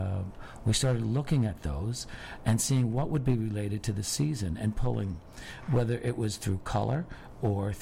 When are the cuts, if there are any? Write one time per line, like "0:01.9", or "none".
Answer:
none